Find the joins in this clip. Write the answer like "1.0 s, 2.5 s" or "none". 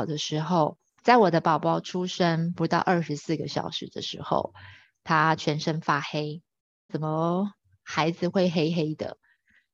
1.0 s, 6.9 s